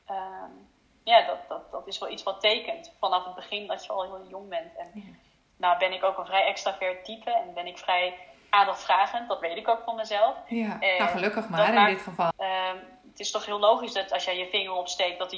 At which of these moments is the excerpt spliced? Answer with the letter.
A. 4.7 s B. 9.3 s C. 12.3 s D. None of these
C